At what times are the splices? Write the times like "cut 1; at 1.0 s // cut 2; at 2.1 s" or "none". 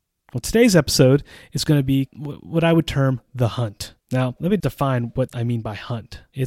cut 1; at 4.0 s

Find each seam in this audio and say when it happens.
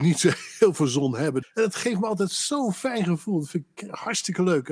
cut 1; at 1.4 s

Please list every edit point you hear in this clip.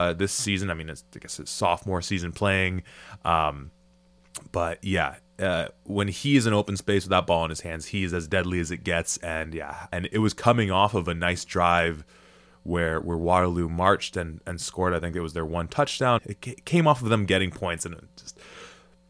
cut 1; at 9.9 s // cut 2; at 16.2 s

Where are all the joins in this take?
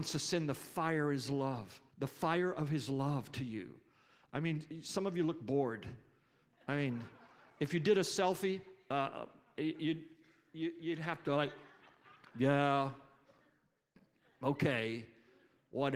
cut 1; at 1.9 s

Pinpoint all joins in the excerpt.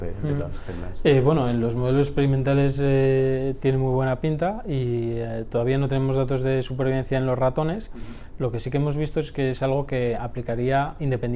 cut 1; at 8.4 s

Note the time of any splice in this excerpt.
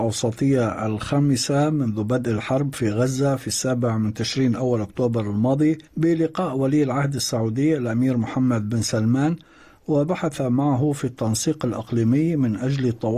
cut 1; at 5.9 s

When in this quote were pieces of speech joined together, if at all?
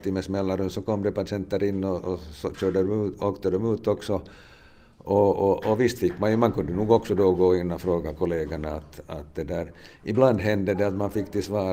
none

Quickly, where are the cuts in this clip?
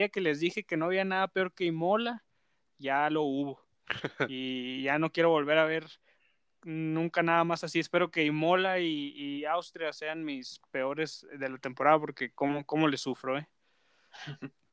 none

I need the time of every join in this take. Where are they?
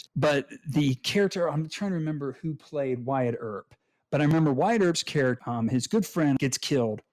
none

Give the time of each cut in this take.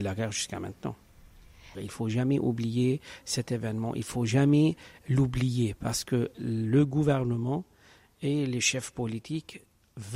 cut 1; at 1.7 s

